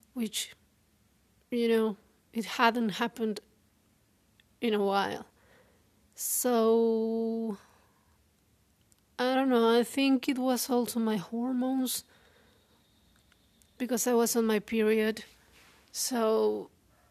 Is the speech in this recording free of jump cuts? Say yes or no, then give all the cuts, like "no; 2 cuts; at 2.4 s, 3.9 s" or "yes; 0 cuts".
yes; 0 cuts